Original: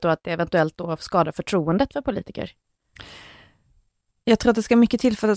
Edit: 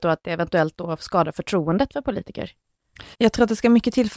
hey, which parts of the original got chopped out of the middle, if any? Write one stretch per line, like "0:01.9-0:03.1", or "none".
0:03.1-0:04.2